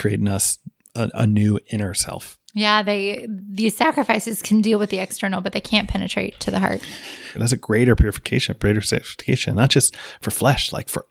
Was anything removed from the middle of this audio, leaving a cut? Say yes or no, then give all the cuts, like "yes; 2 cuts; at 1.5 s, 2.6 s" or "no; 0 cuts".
yes; 2 cuts; at 2.4 s, 7.3 s